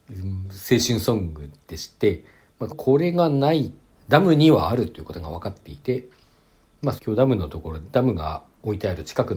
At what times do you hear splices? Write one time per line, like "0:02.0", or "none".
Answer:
0:02.7
0:03.9
0:07.0